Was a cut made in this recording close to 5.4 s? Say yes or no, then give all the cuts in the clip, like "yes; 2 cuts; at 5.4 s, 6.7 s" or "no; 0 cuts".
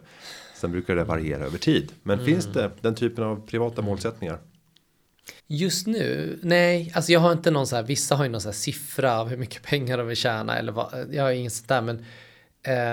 yes; 1 cut; at 5.4 s